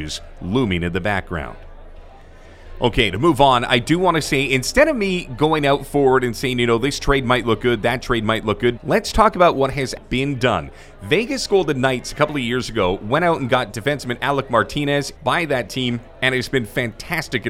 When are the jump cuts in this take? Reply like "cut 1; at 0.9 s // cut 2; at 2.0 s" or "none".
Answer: cut 1; at 8.8 s // cut 2; at 10.0 s // cut 3; at 15.2 s